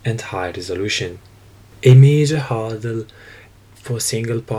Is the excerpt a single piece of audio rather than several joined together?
no; 1 cut; at 1.7 s

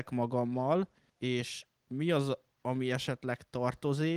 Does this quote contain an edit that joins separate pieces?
no; 0 cuts

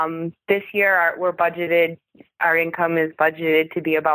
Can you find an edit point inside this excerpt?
no; 0 cuts

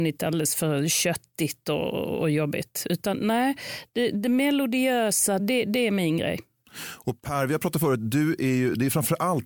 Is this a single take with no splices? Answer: no; 1 cut; at 5.4 s

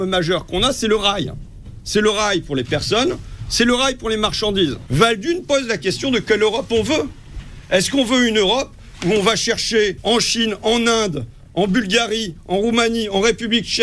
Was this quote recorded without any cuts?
yes; 0 cuts

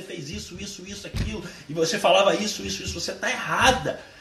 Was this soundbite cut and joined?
no; 0 cuts

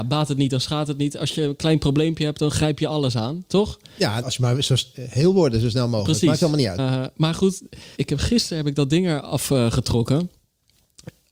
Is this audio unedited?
no; 3 cuts; at 4.2 s, 6.8 s, 8.0 s

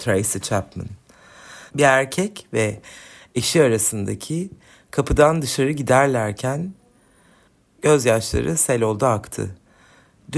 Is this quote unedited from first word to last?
no; 1 cut; at 1.7 s

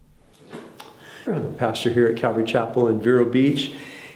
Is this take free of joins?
no; 1 cut; at 1.3 s

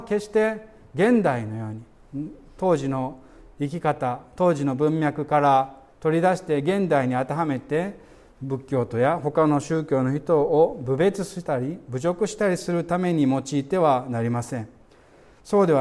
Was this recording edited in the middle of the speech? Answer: no; 0 cuts

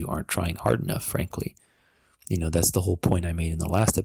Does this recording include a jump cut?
no; 0 cuts

